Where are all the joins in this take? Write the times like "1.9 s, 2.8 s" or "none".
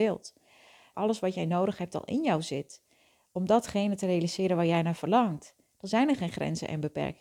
0.9 s